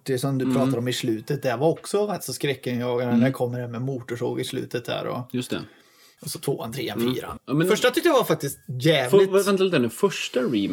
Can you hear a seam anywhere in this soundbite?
yes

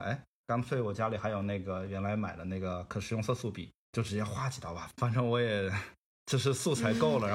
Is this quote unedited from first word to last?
yes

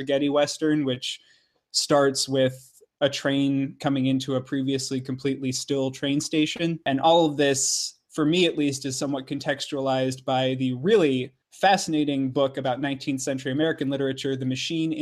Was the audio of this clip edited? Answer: no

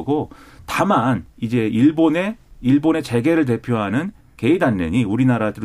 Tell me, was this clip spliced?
no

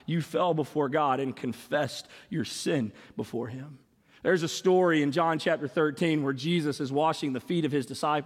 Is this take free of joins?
yes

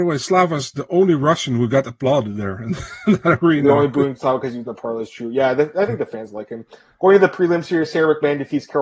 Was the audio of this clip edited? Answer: no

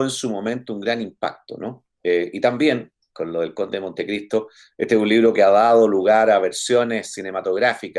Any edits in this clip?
yes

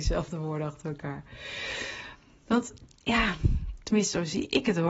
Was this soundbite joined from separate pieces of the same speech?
no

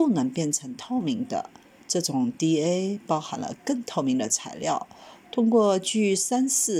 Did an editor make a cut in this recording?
yes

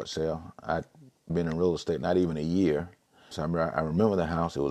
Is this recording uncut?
no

